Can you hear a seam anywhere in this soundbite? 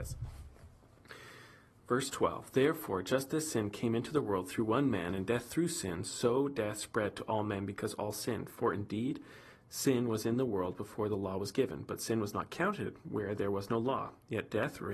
no; 0 cuts

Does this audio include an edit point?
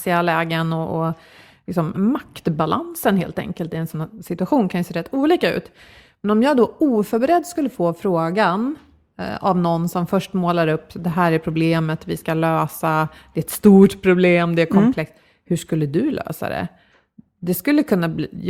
yes; 1 cut; at 1.9 s

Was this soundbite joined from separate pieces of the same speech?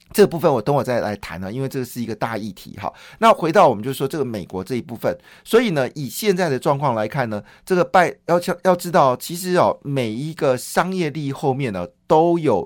no; 0 cuts

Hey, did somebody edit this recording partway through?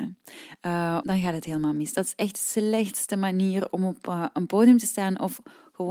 yes; 1 cut; at 1.0 s

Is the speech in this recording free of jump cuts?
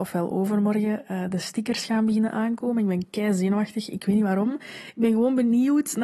yes; 0 cuts

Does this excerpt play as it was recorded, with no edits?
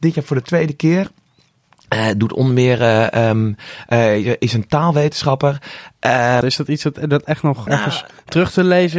no; 2 cuts; at 6.4 s, 7.7 s

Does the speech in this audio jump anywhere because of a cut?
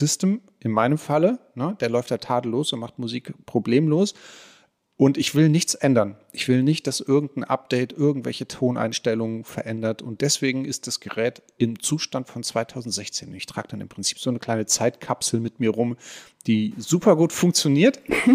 no; 0 cuts

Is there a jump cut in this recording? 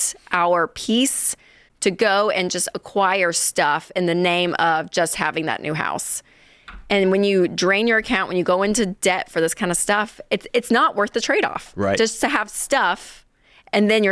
no; 0 cuts

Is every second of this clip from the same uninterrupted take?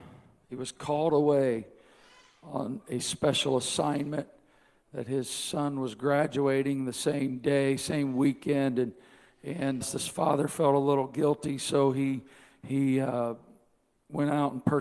no; 1 cut; at 9.8 s

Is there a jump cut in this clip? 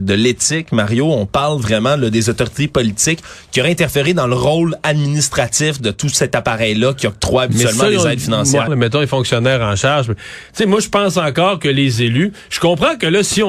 yes; 1 cut; at 8.7 s

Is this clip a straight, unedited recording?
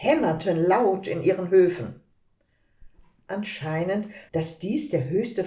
no; 1 cut; at 4.3 s

